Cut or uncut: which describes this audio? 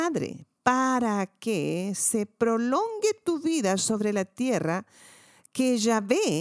uncut